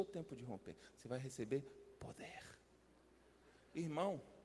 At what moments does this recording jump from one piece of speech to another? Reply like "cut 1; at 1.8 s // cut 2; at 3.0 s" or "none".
none